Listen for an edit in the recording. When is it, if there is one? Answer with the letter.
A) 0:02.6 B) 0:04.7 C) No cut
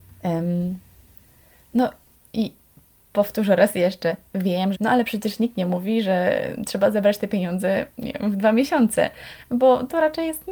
B